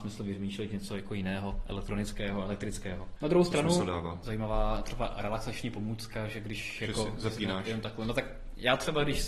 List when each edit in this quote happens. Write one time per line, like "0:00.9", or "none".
0:03.2
0:04.2